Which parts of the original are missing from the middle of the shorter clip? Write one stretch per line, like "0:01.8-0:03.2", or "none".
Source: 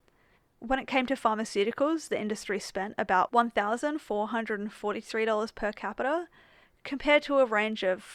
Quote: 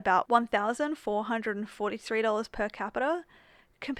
none